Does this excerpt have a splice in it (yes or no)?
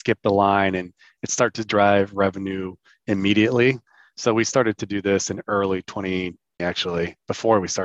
yes